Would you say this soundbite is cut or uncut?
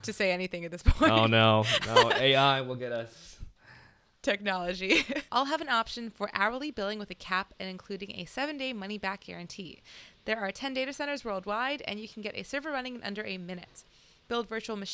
cut